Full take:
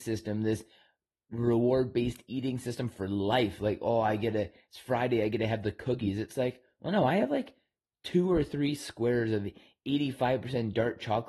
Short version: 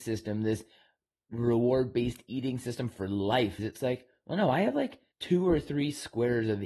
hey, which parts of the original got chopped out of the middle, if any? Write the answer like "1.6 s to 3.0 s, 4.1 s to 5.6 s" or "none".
3.6 s to 6.1 s, 7.7 s to 7.9 s